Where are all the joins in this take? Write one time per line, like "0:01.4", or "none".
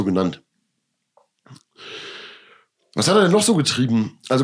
none